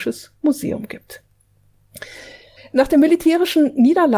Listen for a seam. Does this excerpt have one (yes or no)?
yes